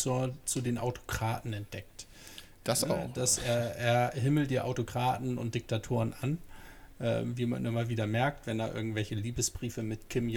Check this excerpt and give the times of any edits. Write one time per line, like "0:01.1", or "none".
none